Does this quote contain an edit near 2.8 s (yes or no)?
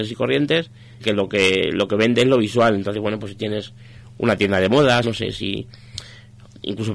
no